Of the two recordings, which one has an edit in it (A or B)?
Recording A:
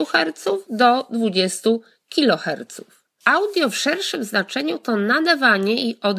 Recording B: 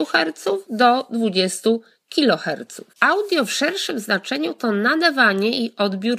B